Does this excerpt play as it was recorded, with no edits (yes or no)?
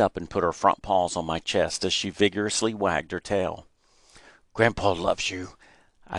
yes